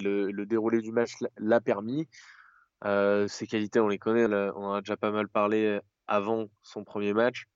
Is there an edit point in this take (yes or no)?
yes